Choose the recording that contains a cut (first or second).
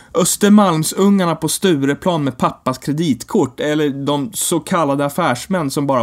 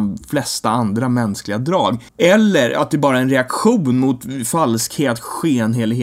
second